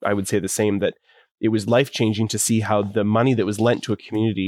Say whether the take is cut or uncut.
uncut